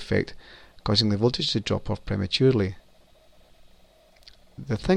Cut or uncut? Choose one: uncut